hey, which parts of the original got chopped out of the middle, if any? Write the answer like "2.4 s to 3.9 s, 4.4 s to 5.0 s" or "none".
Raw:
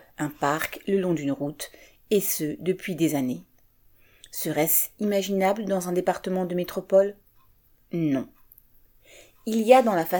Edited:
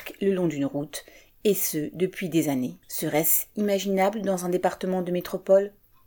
3.5 s to 4.3 s